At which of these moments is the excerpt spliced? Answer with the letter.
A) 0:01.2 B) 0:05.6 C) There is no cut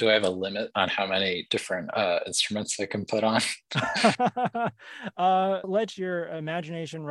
B